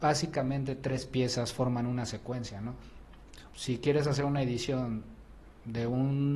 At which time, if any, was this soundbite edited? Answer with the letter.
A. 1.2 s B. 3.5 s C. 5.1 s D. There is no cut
B